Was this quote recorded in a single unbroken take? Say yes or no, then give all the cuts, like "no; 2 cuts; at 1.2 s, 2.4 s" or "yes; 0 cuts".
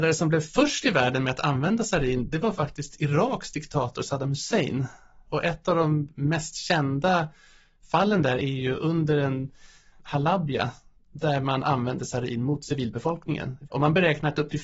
no; 2 cuts; at 9.9 s, 13.7 s